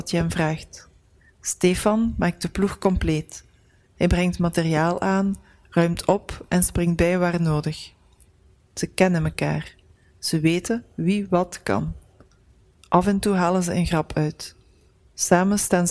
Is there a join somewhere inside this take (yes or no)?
no